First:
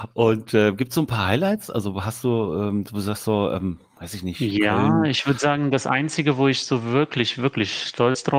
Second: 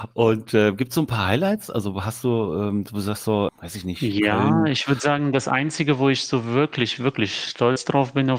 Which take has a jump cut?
second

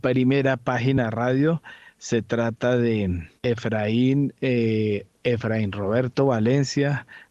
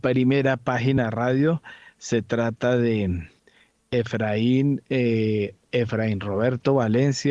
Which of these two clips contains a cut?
first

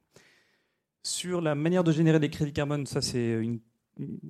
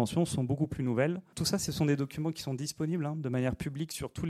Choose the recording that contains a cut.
second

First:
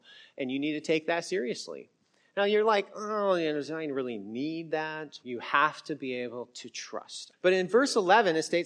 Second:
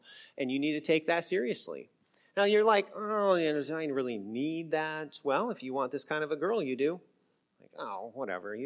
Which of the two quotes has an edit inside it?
first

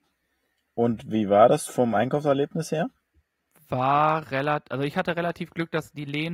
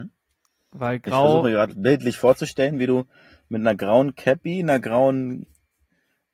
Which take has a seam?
first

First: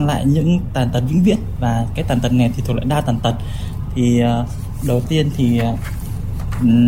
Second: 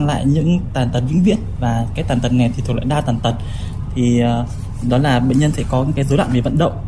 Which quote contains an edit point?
second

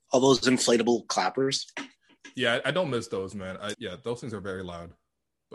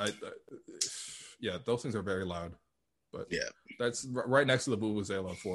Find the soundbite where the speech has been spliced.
first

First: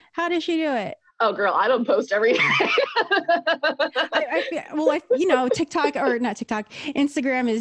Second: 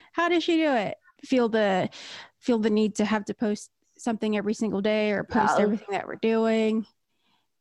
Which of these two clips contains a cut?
second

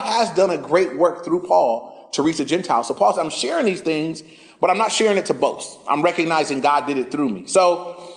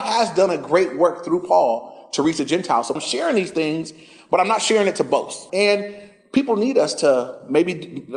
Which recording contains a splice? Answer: second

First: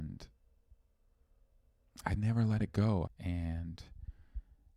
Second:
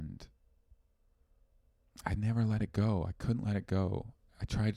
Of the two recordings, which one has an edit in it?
first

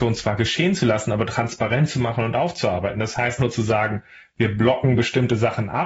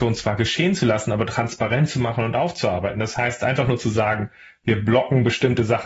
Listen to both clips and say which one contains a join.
first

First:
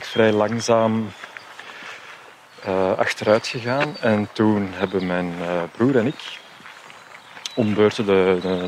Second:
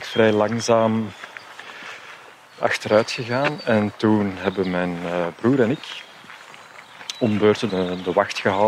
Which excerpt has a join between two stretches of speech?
second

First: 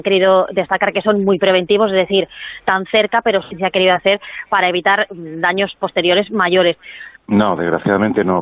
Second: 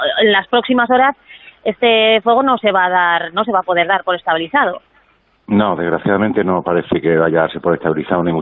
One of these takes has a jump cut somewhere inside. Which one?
first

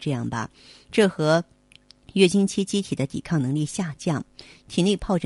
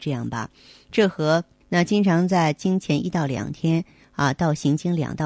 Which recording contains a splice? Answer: second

